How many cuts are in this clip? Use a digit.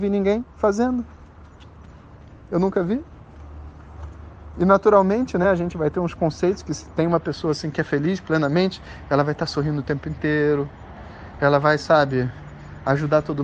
0